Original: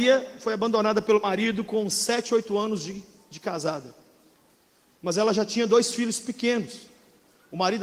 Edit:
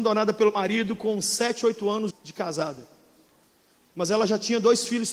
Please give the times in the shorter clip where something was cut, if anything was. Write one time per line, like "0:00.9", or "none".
0:02.1